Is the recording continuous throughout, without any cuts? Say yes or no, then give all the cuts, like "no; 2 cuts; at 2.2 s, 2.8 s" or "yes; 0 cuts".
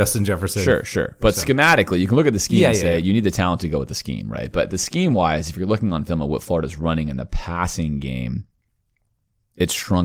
yes; 0 cuts